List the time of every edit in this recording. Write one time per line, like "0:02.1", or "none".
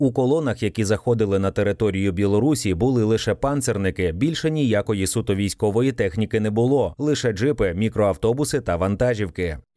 none